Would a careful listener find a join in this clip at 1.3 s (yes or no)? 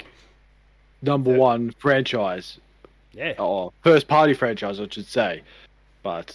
no